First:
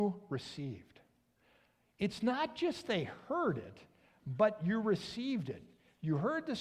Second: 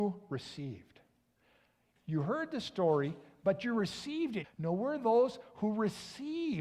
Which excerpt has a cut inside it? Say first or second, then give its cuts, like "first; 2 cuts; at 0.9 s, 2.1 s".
second; 2 cuts; at 2.0 s, 4.4 s